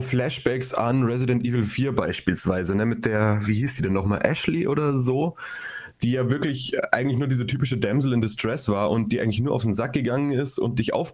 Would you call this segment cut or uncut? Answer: uncut